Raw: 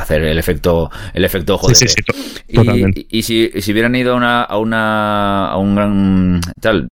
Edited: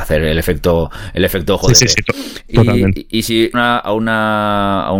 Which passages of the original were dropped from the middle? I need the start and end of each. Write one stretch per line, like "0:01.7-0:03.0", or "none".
0:03.5-0:04.2

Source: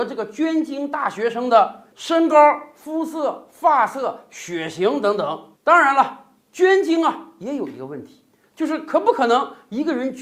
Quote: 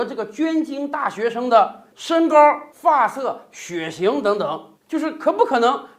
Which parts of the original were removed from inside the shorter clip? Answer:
0:02.7-0:03.5
0:05.6-0:08.5

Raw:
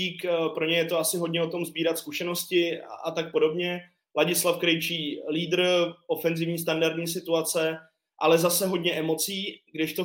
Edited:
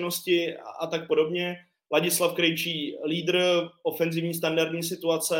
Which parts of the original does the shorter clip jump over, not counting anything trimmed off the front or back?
none

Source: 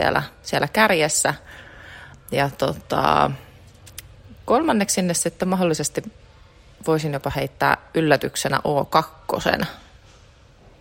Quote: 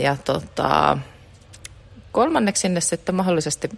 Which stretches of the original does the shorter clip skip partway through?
none

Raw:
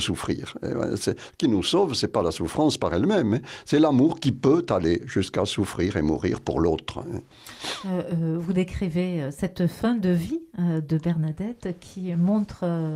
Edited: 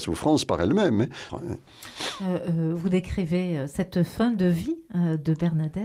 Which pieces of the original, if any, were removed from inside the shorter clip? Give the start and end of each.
0:03.6-0:06.9

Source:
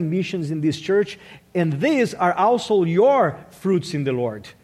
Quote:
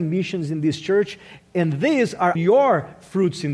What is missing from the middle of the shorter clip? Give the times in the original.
0:02.4-0:02.9

